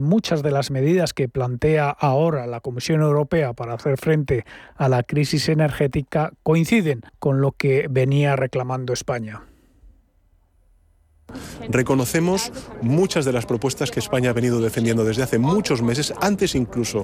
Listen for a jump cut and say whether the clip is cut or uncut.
cut